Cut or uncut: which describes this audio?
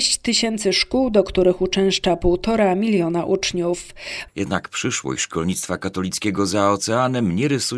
cut